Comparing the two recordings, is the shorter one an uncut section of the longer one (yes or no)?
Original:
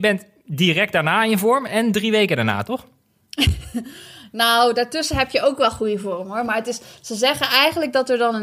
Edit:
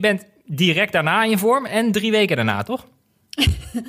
yes